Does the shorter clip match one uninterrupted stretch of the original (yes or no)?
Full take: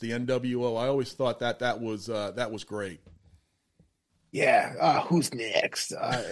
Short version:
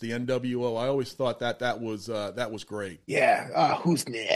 no